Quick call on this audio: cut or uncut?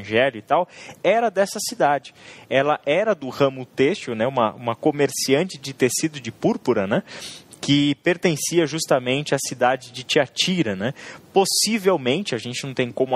uncut